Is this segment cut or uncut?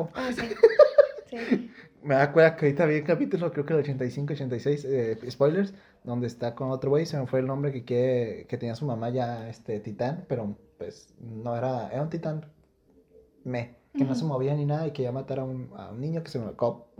uncut